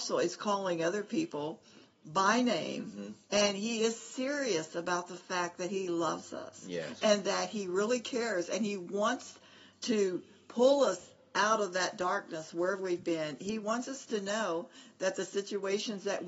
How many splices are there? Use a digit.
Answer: 0